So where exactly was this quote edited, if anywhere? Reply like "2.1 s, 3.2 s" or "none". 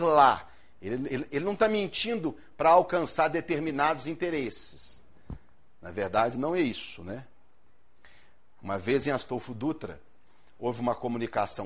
none